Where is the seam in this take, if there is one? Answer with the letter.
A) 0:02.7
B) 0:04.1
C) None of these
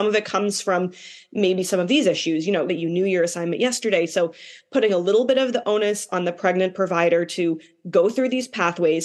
A